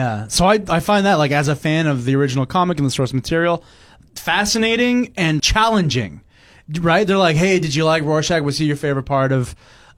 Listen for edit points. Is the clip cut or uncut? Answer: cut